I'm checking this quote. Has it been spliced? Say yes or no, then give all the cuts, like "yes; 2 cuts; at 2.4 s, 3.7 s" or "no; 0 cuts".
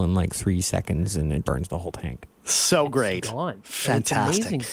yes; 1 cut; at 1.4 s